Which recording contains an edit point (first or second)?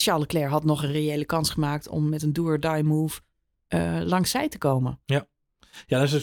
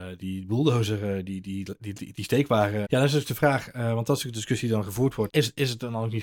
second